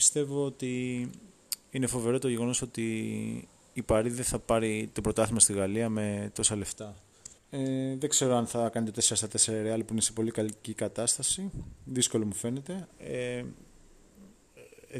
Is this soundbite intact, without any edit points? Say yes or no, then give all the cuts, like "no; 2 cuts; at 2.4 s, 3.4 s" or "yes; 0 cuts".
no; 2 cuts; at 7.4 s, 12.9 s